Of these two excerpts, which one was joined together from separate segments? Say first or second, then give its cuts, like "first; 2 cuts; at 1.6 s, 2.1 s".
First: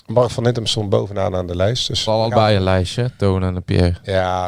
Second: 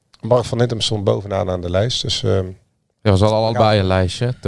first; 1 cut; at 2.1 s